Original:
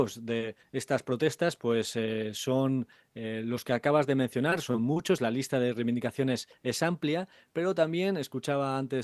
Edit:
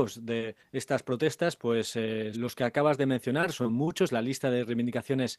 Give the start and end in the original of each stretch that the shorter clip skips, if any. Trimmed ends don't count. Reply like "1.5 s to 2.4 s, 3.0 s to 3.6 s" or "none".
2.3 s to 3.4 s